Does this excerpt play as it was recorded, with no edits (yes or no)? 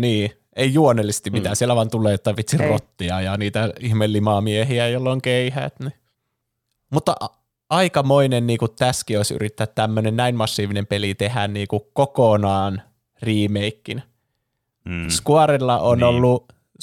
yes